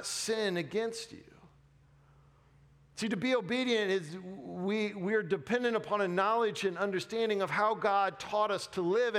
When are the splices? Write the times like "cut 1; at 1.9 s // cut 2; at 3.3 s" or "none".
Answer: none